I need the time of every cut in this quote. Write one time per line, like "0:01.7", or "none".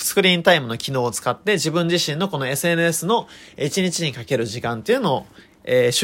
none